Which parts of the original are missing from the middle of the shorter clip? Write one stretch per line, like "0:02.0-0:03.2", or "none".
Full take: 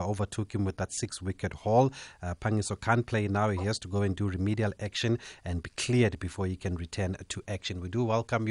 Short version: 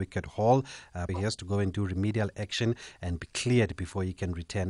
0:02.4-0:03.5